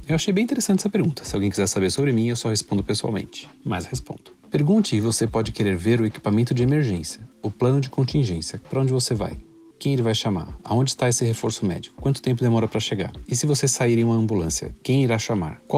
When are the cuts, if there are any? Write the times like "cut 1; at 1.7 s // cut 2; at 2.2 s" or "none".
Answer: cut 1; at 8.6 s